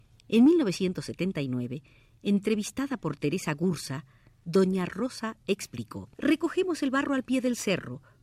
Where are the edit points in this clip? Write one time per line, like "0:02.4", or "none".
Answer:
0:04.4
0:06.1